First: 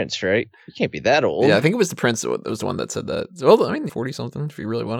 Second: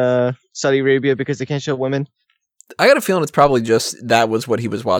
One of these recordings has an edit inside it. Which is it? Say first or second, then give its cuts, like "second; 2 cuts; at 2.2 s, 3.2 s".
first; 1 cut; at 3.9 s